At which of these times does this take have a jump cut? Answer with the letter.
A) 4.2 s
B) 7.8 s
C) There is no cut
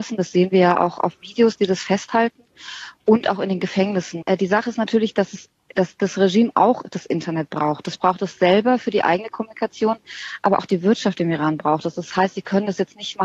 A